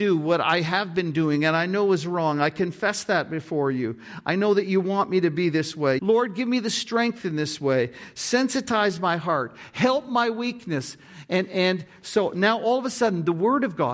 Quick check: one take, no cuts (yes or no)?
no